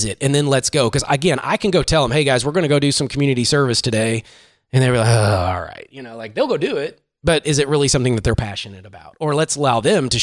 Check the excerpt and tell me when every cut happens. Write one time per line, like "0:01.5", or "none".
none